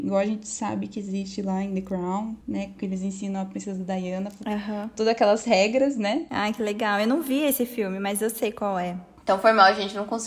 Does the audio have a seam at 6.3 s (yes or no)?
yes